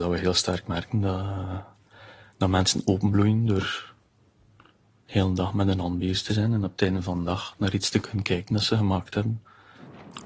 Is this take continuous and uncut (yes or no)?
yes